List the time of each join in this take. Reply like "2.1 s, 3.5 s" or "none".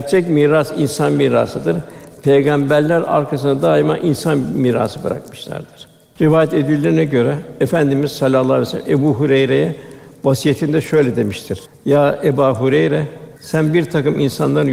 11.7 s, 13.4 s